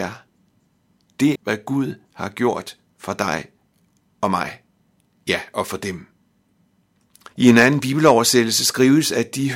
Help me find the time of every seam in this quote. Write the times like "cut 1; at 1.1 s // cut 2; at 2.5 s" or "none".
cut 1; at 1.4 s // cut 2; at 7.3 s